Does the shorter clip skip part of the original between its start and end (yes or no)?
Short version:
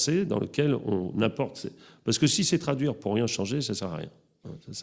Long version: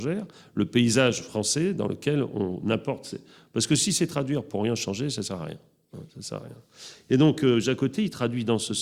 no